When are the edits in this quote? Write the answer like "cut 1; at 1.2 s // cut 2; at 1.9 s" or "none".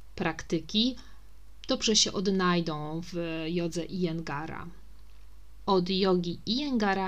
none